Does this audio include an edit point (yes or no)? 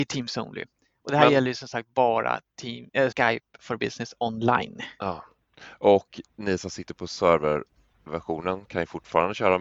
yes